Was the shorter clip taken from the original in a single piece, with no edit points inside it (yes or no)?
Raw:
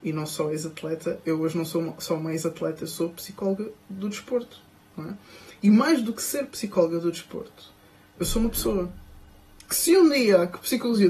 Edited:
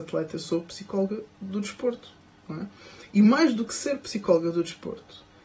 yes